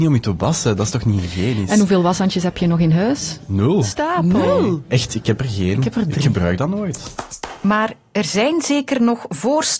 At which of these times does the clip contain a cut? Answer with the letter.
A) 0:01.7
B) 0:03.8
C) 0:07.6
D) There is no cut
B